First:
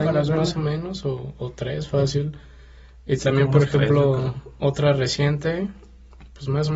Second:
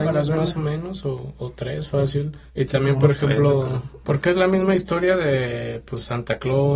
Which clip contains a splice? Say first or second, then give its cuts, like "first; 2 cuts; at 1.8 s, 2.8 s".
second; 2 cuts; at 2.5 s, 4.0 s